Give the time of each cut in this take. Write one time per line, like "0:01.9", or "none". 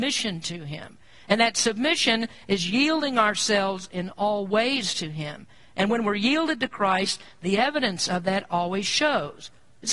none